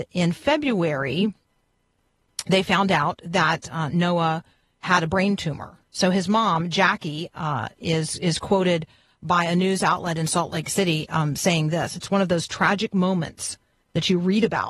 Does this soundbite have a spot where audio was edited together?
no; 0 cuts

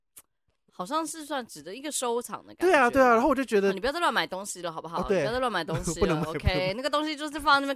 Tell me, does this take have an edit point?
no; 0 cuts

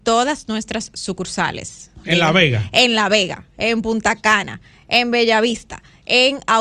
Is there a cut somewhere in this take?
no; 0 cuts

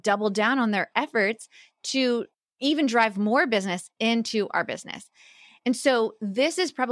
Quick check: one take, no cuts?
yes; 0 cuts

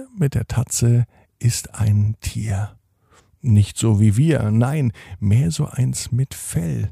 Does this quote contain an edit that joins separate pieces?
no; 0 cuts

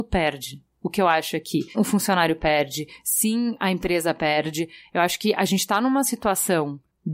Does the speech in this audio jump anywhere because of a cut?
yes; 1 cut; at 1.7 s

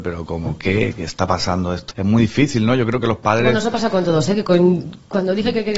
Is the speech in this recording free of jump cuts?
no; 1 cut; at 1.9 s

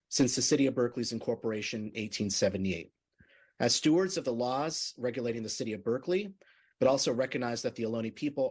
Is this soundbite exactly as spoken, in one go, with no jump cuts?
no; 1 cut; at 6.7 s

